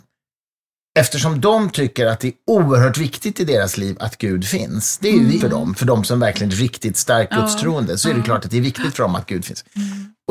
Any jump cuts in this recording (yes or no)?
yes